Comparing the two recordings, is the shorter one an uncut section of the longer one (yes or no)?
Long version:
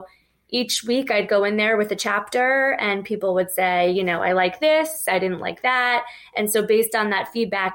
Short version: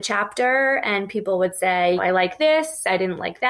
no